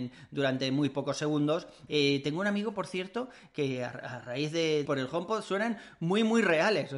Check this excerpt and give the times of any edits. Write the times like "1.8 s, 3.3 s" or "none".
1.9 s, 4.9 s